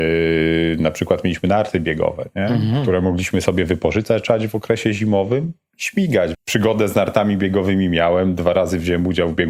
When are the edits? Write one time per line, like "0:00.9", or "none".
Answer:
0:06.3